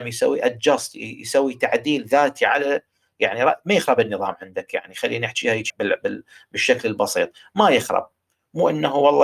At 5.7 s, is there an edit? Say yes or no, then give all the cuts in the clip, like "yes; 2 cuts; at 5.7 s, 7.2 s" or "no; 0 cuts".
yes; 1 cut; at 5.7 s